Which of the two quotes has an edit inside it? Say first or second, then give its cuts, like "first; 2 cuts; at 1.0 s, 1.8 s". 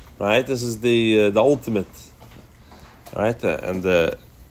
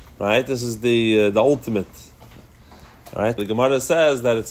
second; 1 cut; at 3.4 s